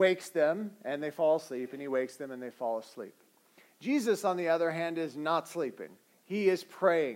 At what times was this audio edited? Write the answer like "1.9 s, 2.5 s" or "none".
none